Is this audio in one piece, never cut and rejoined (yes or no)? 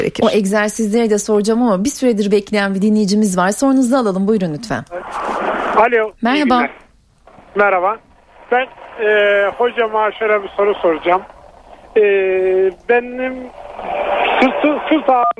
yes